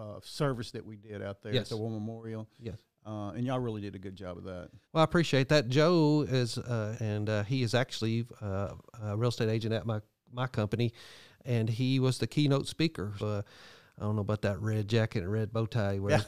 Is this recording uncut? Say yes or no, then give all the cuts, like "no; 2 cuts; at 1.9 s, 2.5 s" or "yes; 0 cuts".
no; 3 cuts; at 4.8 s, 6.9 s, 13.2 s